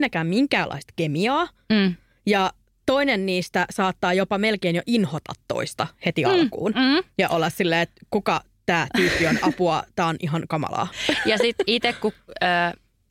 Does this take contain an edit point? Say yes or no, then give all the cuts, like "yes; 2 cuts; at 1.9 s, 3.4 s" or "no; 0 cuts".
no; 0 cuts